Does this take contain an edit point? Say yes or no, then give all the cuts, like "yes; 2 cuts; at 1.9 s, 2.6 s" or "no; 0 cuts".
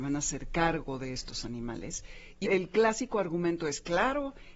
yes; 1 cut; at 2.4 s